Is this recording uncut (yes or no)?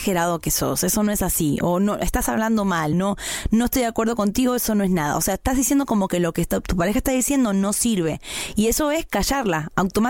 yes